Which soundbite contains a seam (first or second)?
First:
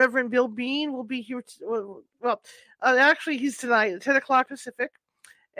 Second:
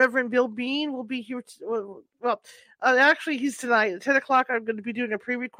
first